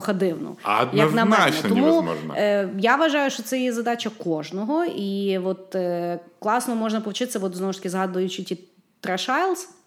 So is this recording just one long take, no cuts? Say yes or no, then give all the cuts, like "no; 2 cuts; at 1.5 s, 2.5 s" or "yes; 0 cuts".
yes; 0 cuts